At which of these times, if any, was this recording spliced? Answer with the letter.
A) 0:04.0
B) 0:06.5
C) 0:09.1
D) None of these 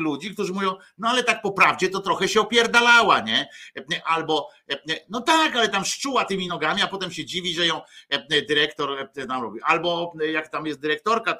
B